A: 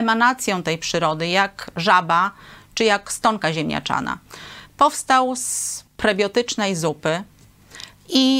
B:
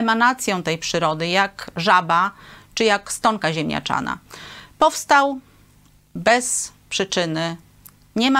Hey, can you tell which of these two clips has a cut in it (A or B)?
A